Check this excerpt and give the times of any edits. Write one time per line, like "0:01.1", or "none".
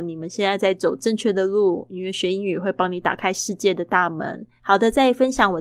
0:04.6